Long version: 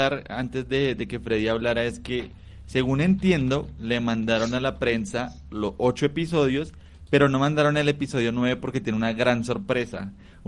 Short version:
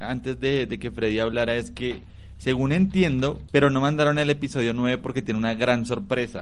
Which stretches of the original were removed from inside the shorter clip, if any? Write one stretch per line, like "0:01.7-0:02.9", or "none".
0:03.8-0:07.1